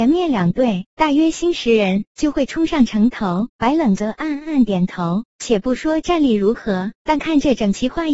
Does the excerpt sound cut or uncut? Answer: uncut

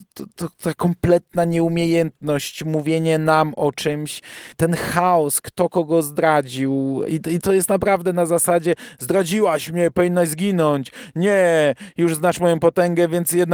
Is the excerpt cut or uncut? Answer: uncut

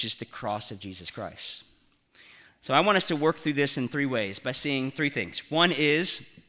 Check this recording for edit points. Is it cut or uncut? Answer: uncut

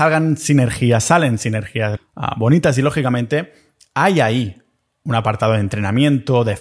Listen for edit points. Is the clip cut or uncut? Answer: cut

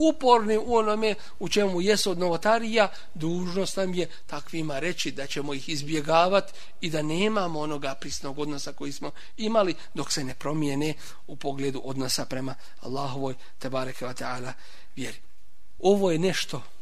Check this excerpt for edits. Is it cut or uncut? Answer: uncut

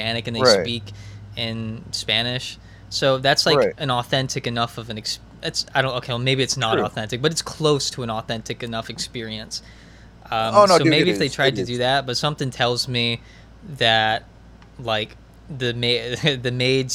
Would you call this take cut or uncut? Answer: uncut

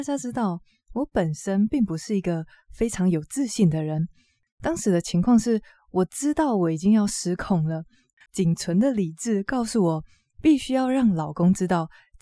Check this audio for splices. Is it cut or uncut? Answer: cut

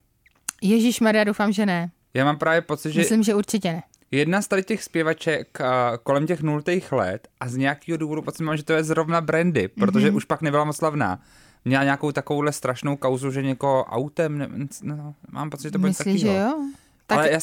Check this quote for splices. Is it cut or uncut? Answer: uncut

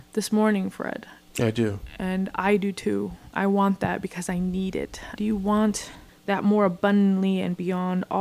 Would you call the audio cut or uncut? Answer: cut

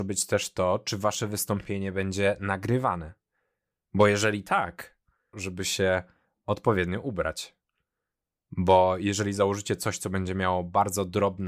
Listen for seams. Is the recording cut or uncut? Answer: cut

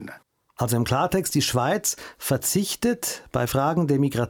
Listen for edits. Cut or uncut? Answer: uncut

